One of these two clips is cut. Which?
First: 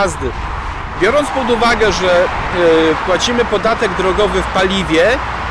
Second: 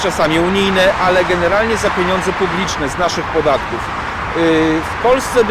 first; 1 cut; at 1.0 s

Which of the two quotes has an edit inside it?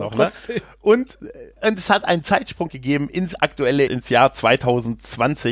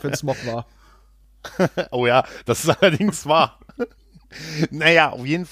first; 2 cuts; at 2.7 s, 3.9 s

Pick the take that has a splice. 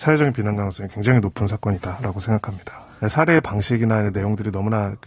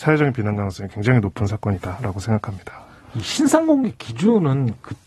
first; 1 cut; at 3.0 s

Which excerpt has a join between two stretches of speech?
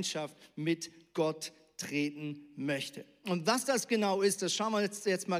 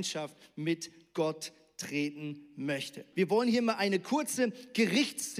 second; 1 cut; at 3.1 s

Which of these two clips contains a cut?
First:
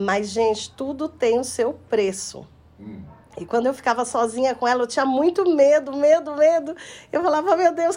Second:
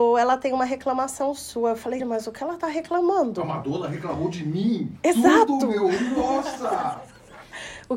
second; 1 cut; at 2.0 s

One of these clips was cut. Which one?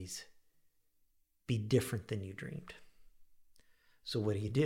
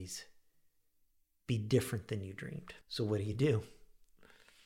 second; 1 cut; at 2.8 s

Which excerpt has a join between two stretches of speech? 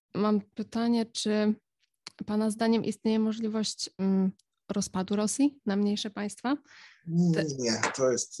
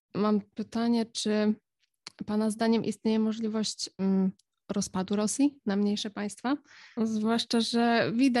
second; 1 cut; at 7.0 s

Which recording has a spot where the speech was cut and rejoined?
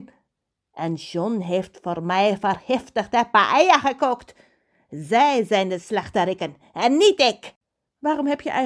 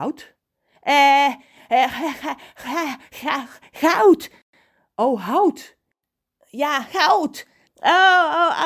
second; 1 cut; at 7.6 s

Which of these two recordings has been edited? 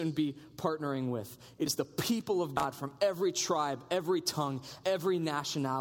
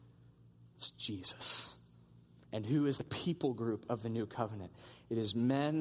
first; 1 cut; at 4.8 s

